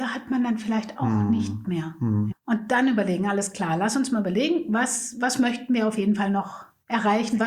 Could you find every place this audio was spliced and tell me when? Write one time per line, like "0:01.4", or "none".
0:02.3